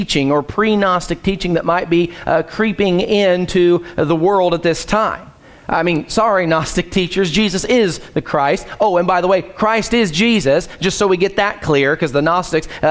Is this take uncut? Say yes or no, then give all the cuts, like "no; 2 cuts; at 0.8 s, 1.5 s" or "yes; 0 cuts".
yes; 0 cuts